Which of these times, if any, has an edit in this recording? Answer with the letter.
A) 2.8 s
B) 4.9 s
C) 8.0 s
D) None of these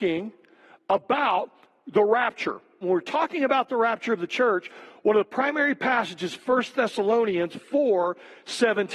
A